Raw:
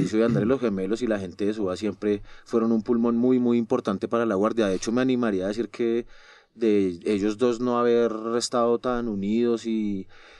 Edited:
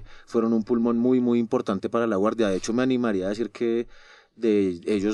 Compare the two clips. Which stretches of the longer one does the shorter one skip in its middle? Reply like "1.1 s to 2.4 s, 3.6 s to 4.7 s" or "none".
none